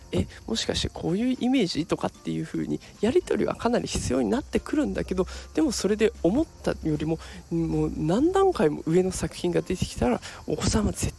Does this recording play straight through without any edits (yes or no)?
yes